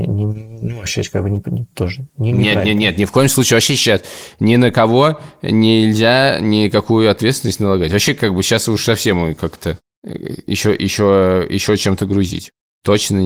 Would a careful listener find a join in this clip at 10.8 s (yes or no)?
no